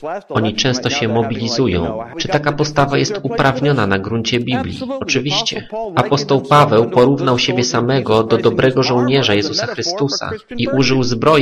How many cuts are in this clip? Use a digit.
1